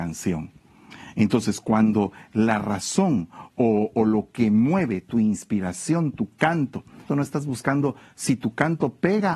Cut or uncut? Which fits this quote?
cut